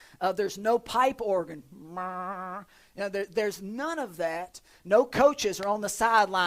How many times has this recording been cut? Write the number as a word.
one